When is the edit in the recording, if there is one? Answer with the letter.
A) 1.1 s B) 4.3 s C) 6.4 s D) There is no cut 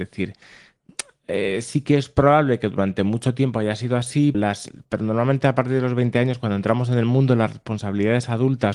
B